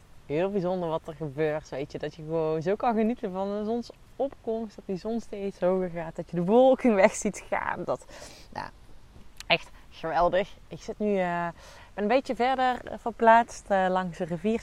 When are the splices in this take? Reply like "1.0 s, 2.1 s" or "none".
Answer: none